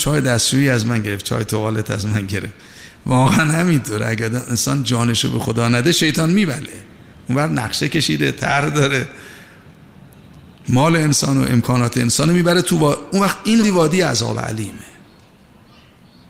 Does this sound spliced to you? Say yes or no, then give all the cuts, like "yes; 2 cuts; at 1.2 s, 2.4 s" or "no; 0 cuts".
yes; 1 cut; at 13.6 s